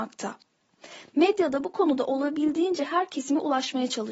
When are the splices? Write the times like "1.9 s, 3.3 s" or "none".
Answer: none